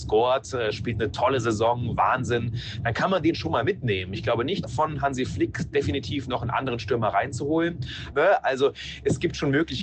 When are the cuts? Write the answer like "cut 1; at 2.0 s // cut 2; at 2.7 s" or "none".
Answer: cut 1; at 4.6 s // cut 2; at 8.1 s

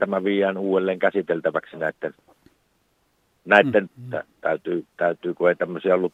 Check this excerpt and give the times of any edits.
cut 1; at 3.9 s

